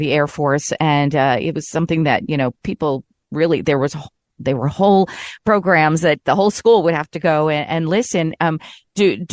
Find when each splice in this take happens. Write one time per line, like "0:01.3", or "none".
none